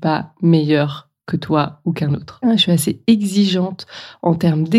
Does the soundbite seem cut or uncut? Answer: cut